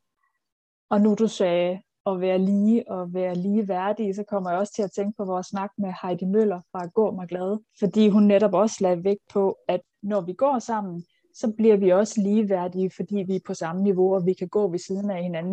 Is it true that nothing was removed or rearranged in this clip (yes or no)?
yes